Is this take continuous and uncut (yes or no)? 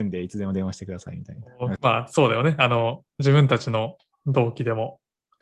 no